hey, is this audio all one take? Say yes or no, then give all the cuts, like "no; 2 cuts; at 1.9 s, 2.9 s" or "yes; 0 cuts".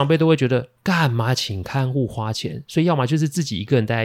yes; 0 cuts